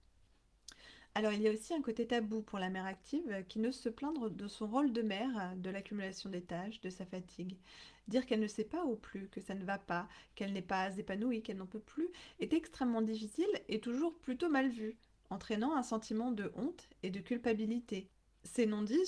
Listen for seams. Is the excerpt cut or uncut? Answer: uncut